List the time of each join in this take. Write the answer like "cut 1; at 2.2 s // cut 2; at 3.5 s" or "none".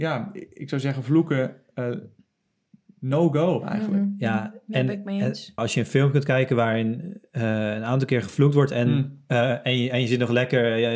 cut 1; at 5.6 s